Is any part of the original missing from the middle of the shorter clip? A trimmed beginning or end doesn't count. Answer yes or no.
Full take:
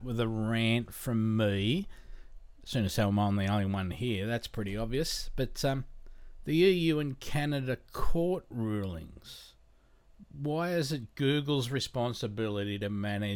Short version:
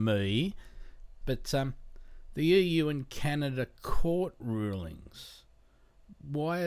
yes